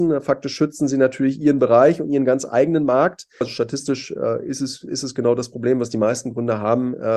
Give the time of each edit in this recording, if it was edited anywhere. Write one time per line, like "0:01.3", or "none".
0:03.4